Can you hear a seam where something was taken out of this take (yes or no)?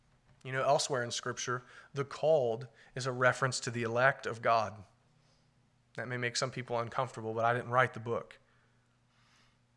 no